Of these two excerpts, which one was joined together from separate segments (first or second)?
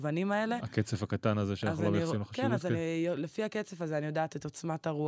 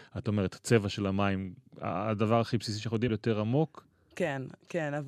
second